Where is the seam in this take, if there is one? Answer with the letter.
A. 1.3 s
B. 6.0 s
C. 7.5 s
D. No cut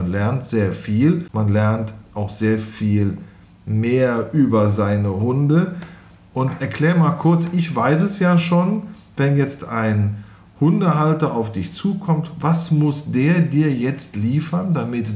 D